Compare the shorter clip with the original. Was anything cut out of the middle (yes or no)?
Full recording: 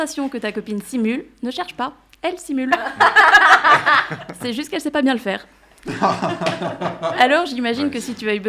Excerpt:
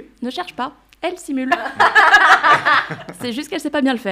no